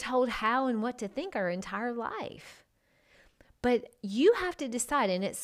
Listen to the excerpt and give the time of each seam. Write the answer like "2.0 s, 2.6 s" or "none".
none